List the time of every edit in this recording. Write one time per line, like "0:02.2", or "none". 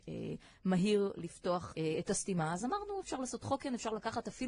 0:01.7